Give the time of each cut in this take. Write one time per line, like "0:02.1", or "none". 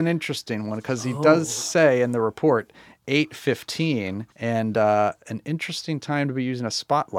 0:04.3